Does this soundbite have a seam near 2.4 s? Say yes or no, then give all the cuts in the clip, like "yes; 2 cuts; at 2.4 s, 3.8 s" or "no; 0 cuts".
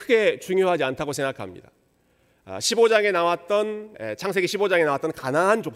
no; 1 cut; at 3.9 s